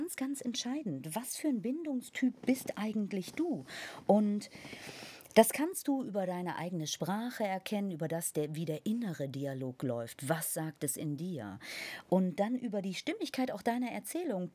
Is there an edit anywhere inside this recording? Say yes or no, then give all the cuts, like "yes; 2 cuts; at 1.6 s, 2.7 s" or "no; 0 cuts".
no; 0 cuts